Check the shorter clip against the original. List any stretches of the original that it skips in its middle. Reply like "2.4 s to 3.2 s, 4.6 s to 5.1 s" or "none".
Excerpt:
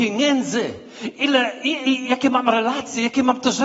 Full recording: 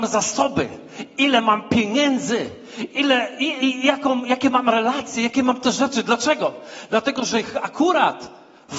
3.8 s to 4.2 s